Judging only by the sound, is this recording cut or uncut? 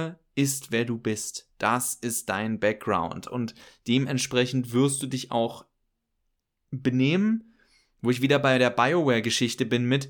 uncut